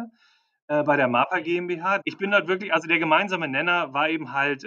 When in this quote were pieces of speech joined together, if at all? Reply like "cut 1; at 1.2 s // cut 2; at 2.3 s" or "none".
cut 1; at 2.0 s